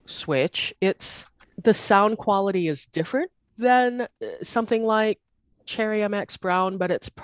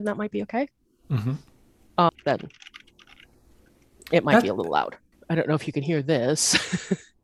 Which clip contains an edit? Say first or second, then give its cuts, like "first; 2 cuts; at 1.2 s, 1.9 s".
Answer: second; 2 cuts; at 2.1 s, 5.1 s